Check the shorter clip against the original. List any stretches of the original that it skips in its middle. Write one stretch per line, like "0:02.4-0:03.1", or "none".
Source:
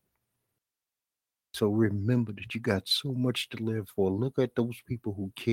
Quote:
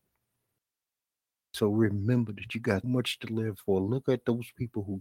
0:02.8-0:03.1